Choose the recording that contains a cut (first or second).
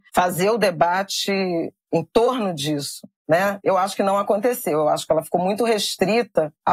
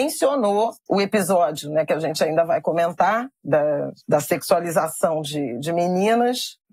first